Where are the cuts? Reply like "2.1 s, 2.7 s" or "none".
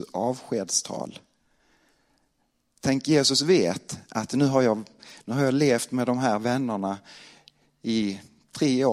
none